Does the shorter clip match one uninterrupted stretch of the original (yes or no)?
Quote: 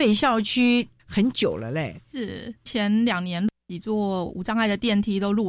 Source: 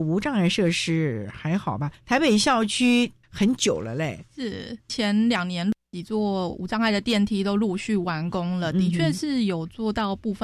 yes